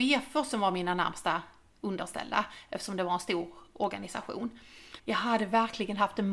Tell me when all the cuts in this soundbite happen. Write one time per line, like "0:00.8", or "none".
0:05.0